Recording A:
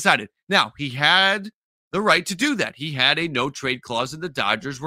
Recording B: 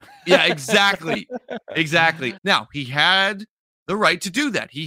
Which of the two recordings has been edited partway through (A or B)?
B